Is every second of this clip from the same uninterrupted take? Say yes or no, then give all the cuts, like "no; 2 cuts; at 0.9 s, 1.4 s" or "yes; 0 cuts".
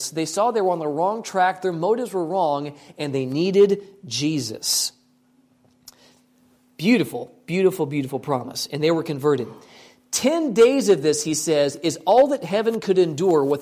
yes; 0 cuts